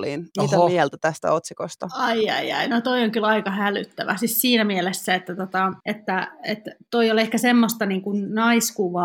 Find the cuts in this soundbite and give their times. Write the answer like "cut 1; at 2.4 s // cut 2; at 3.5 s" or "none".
cut 1; at 5.8 s